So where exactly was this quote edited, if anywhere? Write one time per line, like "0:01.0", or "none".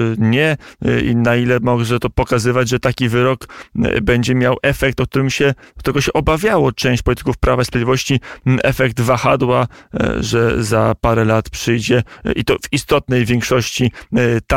none